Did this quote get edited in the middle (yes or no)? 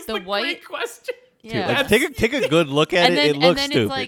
yes